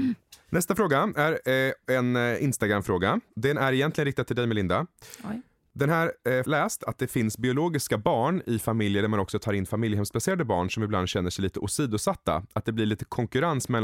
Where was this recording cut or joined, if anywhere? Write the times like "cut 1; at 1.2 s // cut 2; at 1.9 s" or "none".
cut 1; at 6.4 s